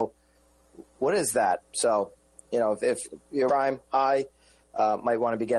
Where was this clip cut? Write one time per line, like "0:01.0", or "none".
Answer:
0:01.6
0:03.5